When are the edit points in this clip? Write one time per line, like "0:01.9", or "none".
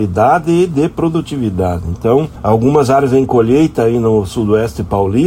none